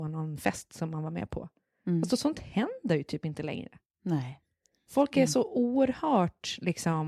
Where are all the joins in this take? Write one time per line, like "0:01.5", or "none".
none

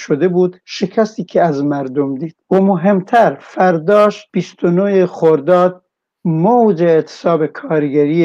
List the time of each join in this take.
0:02.4
0:04.3

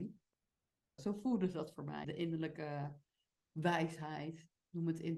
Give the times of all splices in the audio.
0:01.0
0:02.0

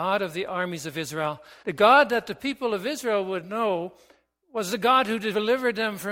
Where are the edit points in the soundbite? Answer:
0:01.6

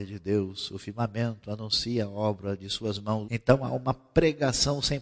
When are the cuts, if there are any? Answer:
0:03.2

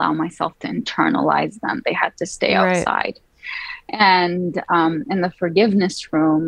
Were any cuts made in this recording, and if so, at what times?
none

